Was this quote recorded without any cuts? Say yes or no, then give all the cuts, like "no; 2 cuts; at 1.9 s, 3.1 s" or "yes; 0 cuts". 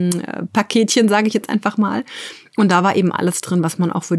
yes; 0 cuts